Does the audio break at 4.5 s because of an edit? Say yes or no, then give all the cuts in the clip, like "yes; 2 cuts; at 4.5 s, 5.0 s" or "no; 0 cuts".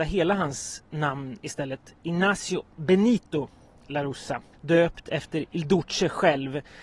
yes; 1 cut; at 4.5 s